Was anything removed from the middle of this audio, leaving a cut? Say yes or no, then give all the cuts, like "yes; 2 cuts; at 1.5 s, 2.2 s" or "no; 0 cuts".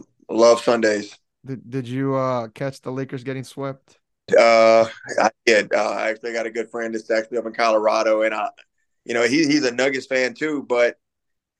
yes; 1 cut; at 4.3 s